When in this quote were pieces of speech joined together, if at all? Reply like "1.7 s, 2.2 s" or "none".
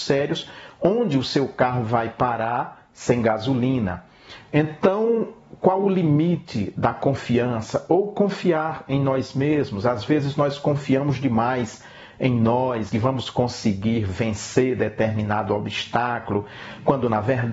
12.9 s